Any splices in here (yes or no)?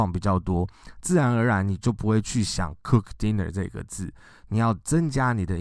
no